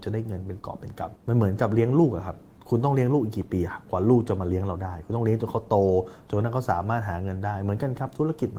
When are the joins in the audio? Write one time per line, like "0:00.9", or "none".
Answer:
0:01.2